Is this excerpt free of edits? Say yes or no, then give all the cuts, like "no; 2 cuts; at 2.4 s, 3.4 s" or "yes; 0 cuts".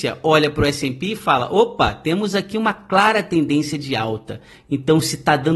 yes; 0 cuts